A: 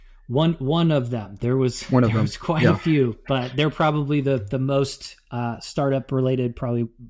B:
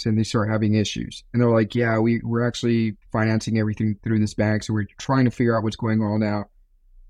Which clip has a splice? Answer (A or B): B